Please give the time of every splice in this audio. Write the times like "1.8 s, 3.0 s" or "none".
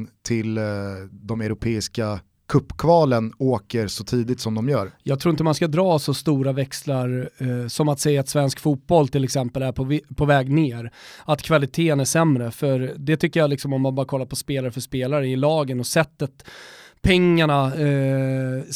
none